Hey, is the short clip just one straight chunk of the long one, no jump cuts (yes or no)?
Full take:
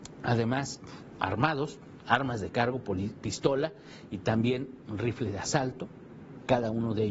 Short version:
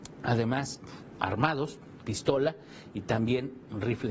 no